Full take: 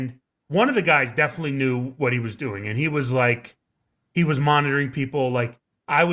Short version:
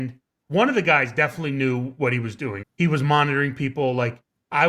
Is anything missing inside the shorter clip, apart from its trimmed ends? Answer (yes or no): yes